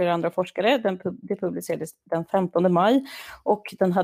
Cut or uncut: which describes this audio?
uncut